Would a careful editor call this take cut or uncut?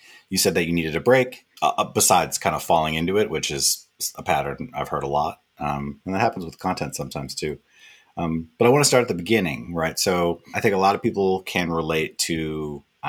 cut